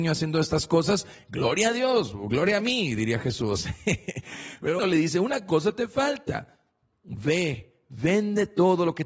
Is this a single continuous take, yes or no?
no